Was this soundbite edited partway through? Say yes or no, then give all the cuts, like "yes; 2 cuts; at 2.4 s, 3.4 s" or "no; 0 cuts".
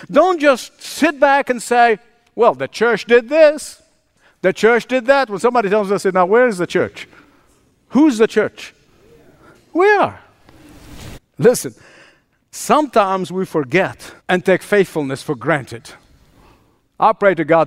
yes; 2 cuts; at 11.1 s, 14.2 s